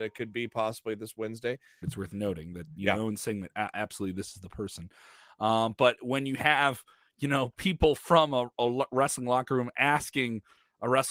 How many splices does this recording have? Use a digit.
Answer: 1